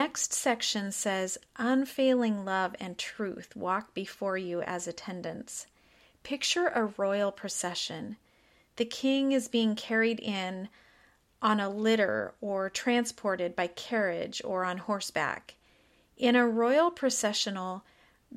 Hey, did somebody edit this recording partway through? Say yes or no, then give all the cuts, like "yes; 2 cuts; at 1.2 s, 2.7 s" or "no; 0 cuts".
no; 0 cuts